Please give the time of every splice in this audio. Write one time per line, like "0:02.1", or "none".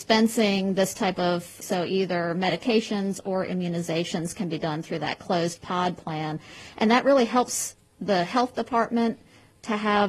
0:01.6